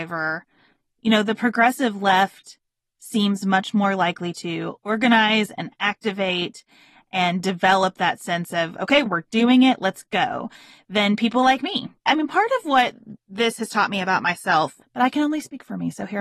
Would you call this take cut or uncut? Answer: cut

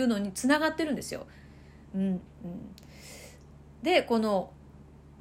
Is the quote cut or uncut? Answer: cut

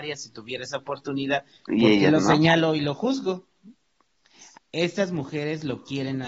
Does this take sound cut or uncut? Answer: cut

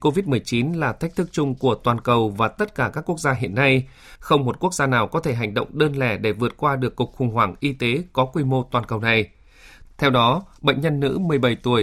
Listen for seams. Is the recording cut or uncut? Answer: cut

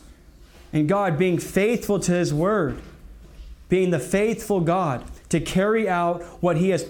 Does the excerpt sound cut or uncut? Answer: uncut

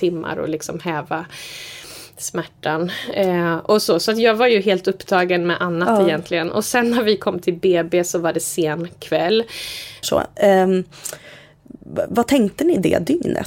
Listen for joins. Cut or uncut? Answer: cut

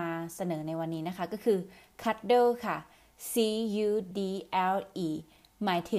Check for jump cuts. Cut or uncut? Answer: cut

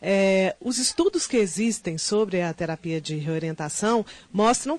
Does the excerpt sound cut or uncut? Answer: uncut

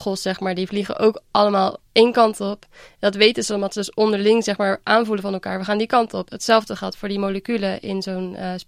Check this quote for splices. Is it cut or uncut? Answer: uncut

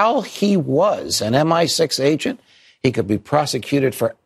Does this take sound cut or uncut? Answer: uncut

